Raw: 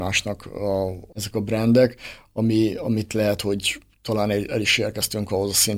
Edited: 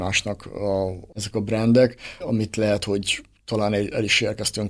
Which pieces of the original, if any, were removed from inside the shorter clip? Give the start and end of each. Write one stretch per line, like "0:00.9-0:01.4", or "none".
0:02.2-0:02.8